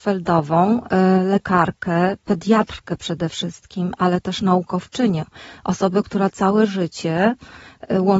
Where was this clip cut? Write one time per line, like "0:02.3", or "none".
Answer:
none

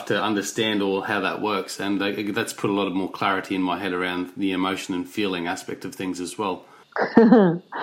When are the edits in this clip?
0:06.8

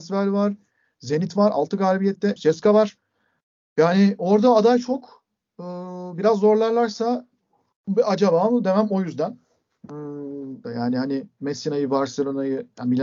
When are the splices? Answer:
0:02.4
0:10.6

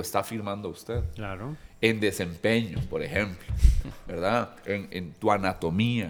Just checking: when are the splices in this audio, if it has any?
0:04.9

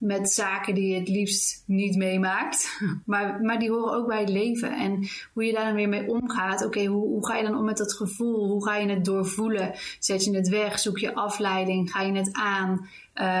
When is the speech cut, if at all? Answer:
none

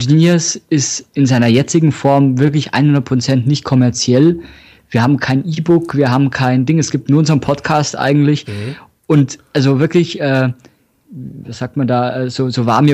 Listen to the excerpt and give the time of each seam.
none

